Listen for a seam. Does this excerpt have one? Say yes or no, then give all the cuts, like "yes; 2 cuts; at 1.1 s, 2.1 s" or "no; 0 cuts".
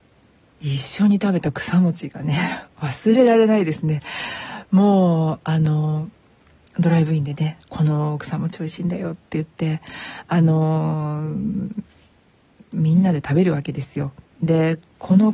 yes; 1 cut; at 7.7 s